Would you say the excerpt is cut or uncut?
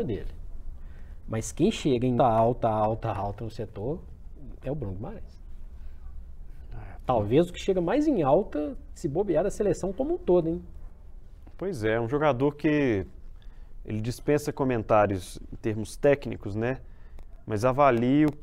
cut